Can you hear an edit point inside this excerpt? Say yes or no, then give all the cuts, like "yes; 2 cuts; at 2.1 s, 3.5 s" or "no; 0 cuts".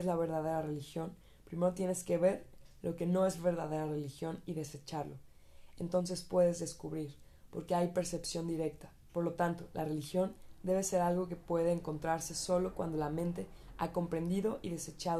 yes; 1 cut; at 9.1 s